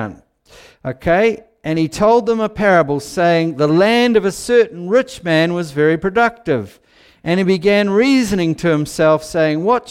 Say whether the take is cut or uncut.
uncut